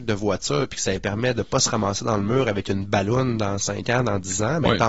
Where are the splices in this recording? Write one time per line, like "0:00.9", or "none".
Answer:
none

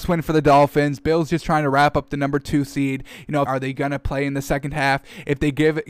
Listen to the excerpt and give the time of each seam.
0:03.5

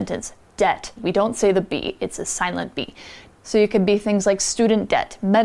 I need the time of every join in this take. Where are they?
0:01.0
0:03.3

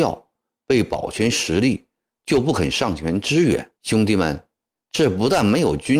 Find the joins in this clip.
0:03.7

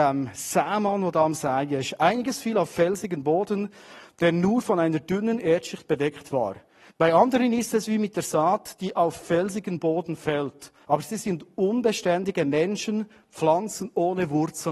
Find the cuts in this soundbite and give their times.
0:06.9
0:10.8

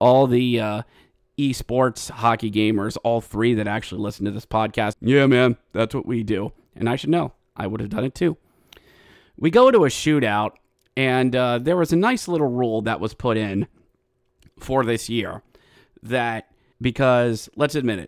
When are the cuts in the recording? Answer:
0:04.9
0:16.7

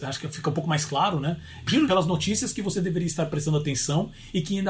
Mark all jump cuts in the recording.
0:01.7

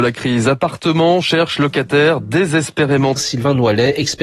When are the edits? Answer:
0:03.2

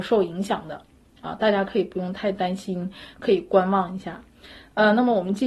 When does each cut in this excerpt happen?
none

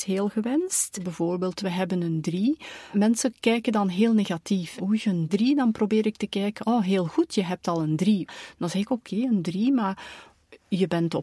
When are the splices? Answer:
0:08.5

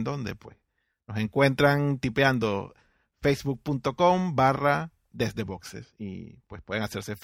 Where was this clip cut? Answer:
none

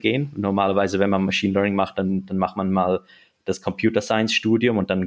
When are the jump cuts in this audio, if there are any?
none

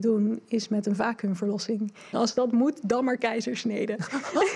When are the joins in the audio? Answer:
0:02.1

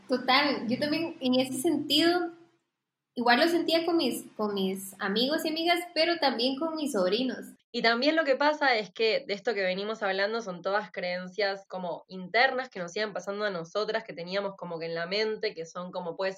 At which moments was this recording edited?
0:07.6
0:11.7

